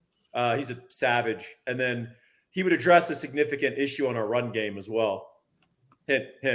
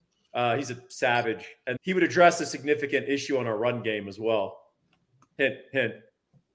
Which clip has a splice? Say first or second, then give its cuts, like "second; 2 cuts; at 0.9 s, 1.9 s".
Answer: second; 1 cut; at 1.8 s